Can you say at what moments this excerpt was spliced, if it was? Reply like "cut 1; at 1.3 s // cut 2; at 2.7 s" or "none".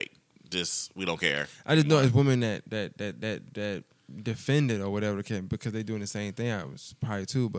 none